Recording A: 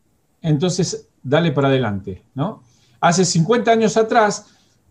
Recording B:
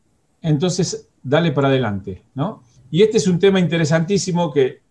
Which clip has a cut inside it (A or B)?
B